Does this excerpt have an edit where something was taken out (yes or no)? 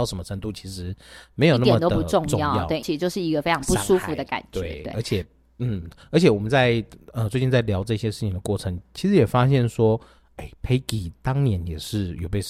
yes